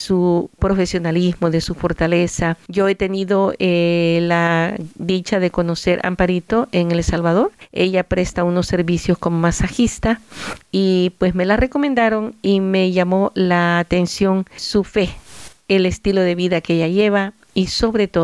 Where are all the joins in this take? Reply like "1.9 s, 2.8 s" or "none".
none